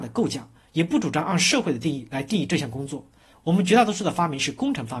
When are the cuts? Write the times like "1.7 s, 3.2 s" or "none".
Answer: 3.3 s

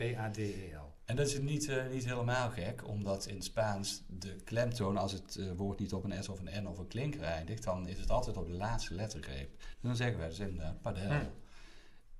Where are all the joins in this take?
none

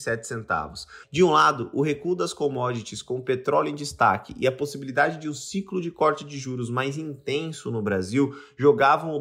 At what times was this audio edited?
1.0 s

